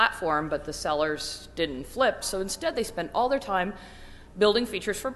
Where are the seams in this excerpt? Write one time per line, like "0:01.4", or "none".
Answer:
0:02.2